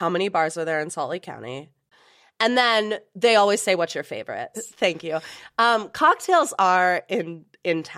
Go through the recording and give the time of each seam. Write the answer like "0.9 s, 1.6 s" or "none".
4.5 s